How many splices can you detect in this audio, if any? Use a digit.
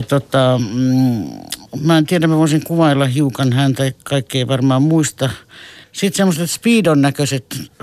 1